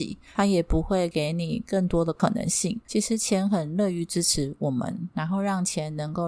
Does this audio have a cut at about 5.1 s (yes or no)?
yes